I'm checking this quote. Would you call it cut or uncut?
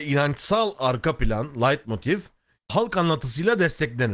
cut